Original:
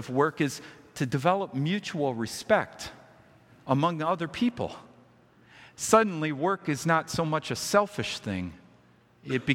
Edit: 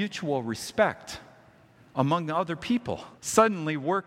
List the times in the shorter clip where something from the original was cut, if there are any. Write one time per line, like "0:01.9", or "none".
0:03.2

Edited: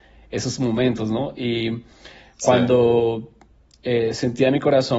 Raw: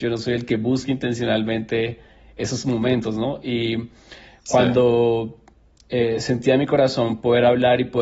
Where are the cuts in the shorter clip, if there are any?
none

